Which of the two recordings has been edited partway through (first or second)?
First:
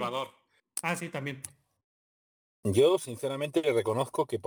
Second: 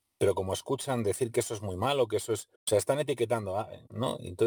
second